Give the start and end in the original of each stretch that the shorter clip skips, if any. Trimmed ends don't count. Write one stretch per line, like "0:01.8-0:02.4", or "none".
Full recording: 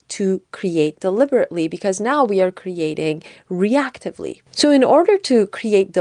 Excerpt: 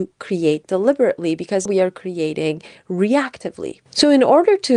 0:02.0-0:02.3